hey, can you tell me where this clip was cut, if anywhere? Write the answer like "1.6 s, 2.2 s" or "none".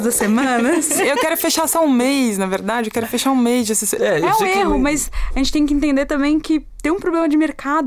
4.0 s